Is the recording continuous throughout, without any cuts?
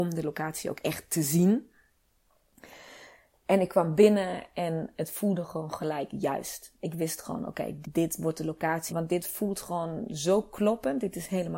no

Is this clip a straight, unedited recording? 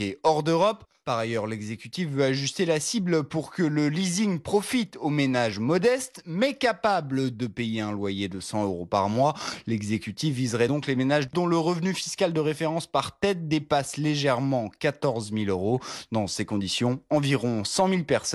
yes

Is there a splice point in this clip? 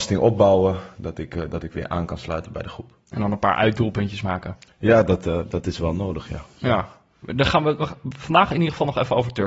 no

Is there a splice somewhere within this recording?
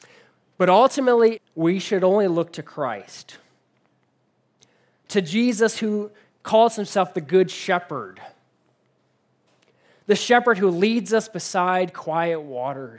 yes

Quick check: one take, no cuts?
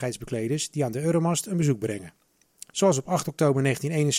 yes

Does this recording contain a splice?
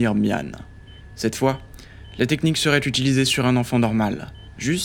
no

